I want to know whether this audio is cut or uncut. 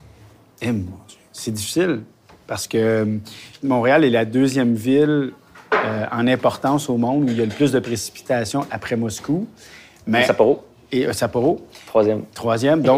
uncut